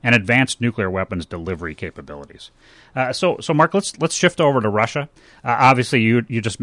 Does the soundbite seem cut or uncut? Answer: uncut